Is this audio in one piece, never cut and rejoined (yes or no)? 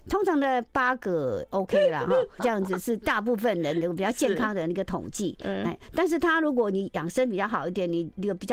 no